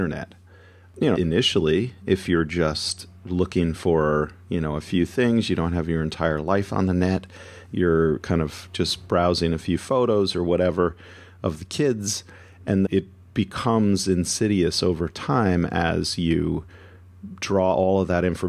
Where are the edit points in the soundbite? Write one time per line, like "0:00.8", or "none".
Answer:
0:01.2
0:12.9